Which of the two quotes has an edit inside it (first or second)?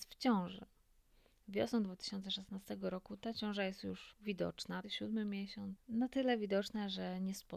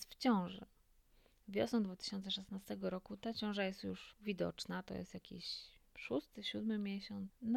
first